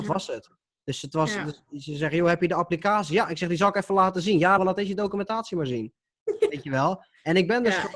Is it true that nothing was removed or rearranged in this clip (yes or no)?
no